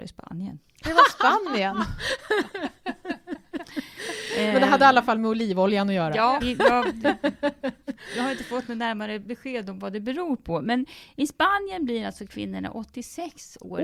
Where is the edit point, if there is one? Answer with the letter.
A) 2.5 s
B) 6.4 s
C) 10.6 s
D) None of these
B